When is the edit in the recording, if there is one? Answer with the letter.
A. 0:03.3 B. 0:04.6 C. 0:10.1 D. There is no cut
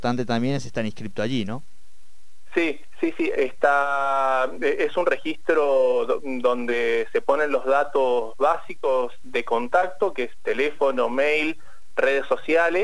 A